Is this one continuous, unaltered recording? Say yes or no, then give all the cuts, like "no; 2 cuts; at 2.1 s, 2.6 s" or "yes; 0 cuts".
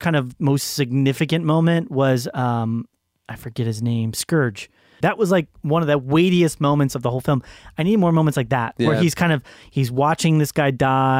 no; 1 cut; at 5.0 s